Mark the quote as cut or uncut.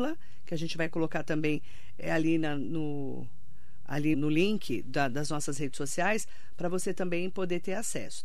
cut